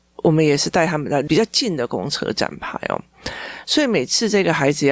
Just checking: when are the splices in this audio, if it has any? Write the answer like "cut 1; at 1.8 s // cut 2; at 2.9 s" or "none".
cut 1; at 3.6 s